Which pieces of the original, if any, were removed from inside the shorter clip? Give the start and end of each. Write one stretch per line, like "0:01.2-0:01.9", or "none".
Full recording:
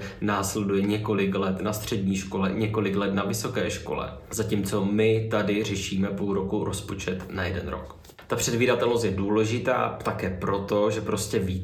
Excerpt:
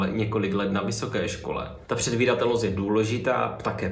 0:04.3-0:08.3